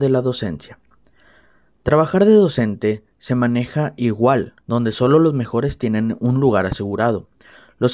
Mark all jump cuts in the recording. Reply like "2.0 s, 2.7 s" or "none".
4.6 s